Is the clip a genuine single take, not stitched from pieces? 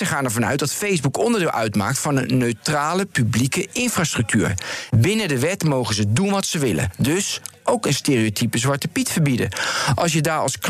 no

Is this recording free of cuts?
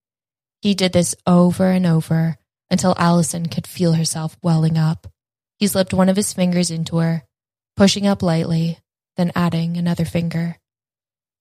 no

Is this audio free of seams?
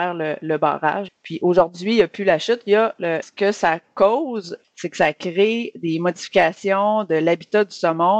no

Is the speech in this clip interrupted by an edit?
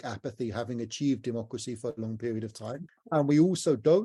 no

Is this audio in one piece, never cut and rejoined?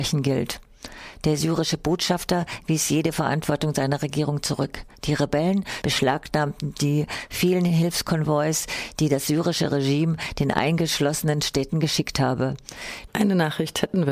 no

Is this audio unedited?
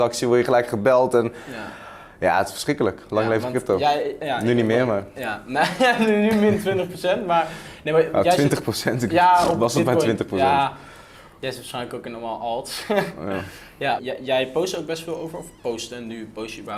no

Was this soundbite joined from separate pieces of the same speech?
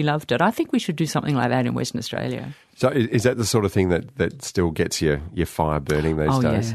no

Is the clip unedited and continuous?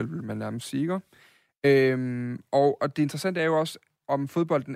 yes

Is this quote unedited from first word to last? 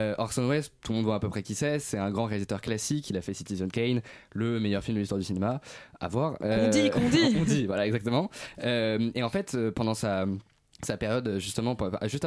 yes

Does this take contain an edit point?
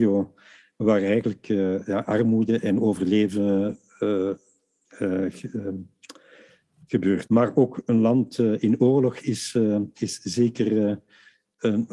yes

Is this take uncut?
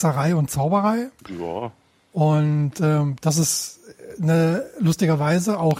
no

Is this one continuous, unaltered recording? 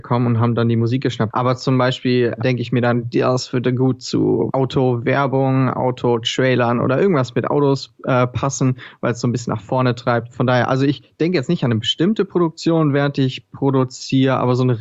no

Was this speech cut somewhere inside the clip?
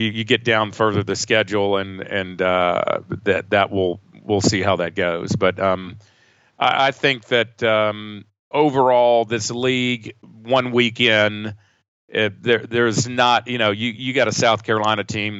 no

